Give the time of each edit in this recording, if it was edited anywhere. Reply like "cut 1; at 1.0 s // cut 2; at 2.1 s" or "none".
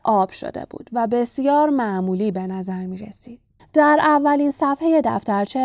cut 1; at 3.6 s